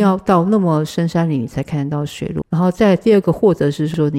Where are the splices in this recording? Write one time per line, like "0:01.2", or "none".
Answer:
0:02.4

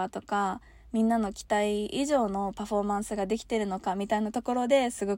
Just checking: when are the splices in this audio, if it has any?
none

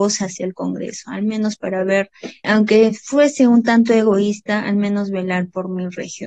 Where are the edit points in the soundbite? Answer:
0:02.4

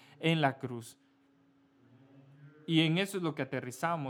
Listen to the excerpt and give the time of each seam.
none

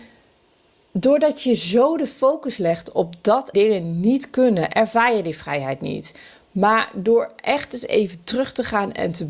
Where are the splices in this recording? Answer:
0:03.5

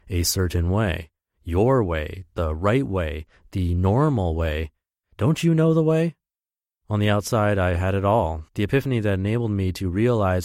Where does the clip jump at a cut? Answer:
0:05.0
0:08.5

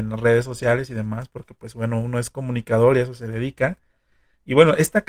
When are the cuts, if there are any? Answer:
none

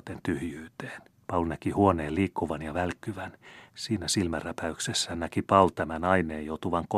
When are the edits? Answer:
0:01.2
0:03.7

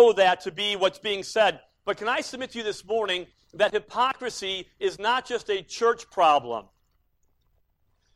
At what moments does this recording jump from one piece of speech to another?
none

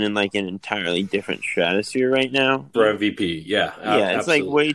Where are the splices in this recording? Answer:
0:02.7

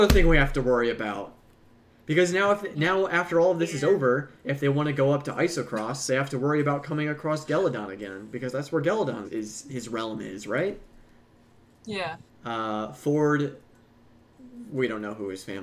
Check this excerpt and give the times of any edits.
0:09.2
0:12.3

